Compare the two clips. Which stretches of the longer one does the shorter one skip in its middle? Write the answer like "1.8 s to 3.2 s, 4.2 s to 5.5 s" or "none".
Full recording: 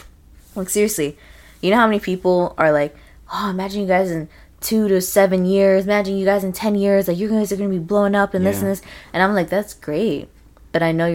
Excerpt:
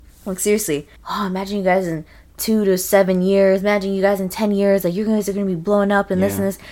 1.3 s to 3.2 s